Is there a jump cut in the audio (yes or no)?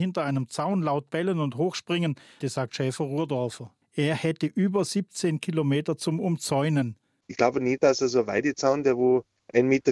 yes